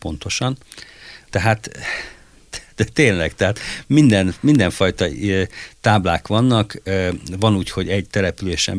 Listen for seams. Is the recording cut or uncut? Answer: cut